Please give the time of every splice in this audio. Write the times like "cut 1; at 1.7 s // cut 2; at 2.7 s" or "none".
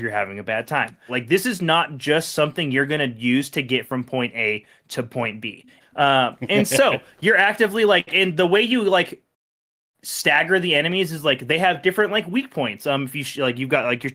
cut 1; at 1.1 s // cut 2; at 5.8 s